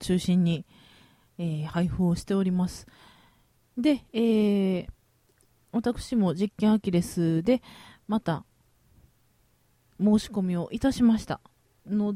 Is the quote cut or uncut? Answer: cut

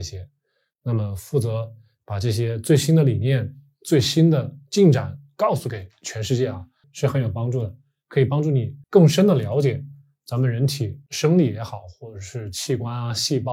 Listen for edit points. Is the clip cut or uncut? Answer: cut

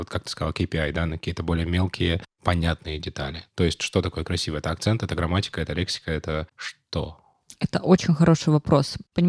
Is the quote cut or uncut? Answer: uncut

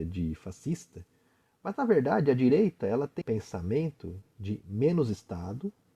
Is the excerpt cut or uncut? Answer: cut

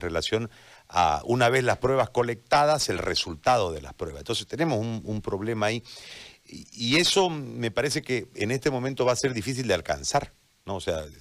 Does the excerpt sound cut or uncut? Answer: uncut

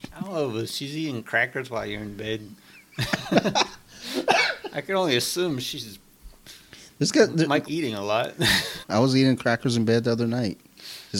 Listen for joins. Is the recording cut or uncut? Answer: cut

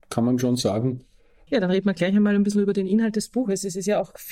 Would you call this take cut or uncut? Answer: cut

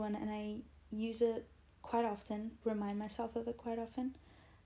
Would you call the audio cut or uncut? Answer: cut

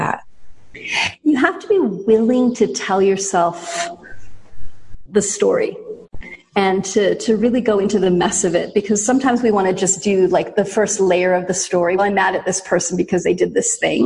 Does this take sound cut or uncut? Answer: cut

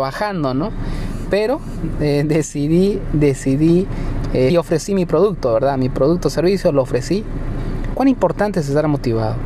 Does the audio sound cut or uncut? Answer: cut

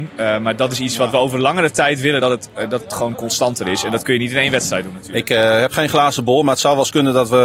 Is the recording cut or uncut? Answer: uncut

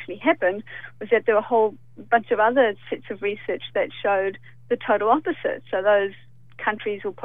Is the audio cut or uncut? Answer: uncut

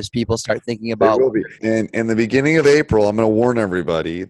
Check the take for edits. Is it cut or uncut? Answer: cut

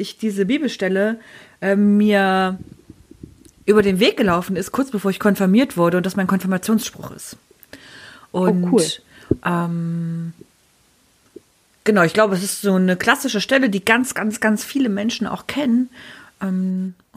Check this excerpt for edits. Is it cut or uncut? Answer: uncut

